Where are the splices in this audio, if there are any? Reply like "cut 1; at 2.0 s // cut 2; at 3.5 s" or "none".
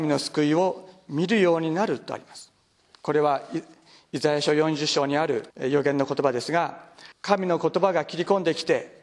cut 1; at 5.5 s // cut 2; at 7.1 s

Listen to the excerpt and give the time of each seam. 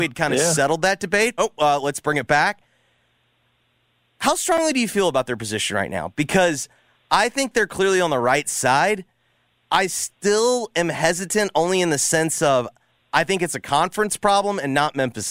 cut 1; at 1.4 s

